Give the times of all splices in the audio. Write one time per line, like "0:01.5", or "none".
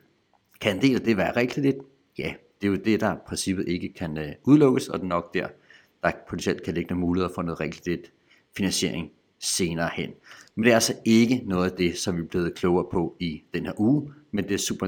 none

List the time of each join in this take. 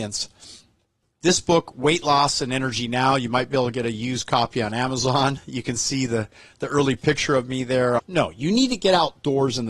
0:01.0
0:08.0

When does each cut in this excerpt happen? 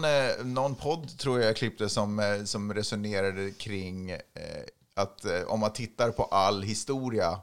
none

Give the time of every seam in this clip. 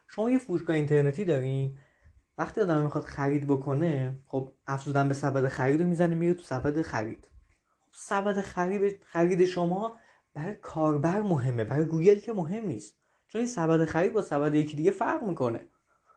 none

